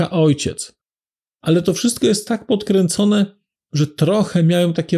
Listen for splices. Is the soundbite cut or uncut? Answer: cut